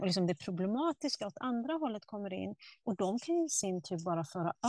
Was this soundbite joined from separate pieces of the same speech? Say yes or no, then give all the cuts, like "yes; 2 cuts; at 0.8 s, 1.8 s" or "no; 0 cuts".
yes; 1 cut; at 2.8 s